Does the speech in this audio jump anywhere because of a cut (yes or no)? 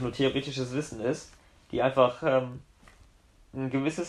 no